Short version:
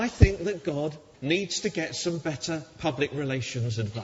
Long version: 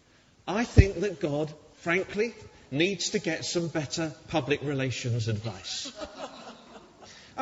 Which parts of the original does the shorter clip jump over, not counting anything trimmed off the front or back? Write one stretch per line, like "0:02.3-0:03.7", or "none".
0:01.7-0:02.6